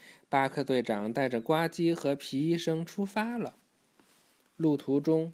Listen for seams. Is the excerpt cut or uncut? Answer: uncut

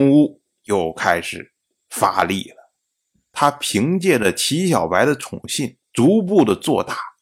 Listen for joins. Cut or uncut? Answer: cut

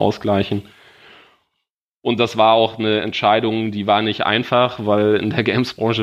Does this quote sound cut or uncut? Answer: uncut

